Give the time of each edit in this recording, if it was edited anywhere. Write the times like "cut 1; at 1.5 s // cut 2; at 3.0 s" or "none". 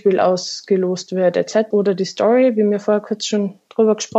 cut 1; at 1.7 s